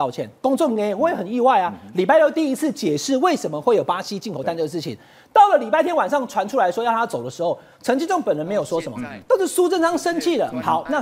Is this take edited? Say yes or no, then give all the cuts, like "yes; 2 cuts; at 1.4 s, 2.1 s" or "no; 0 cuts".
no; 0 cuts